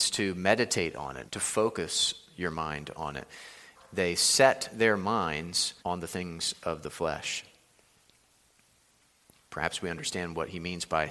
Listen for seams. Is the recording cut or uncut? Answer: cut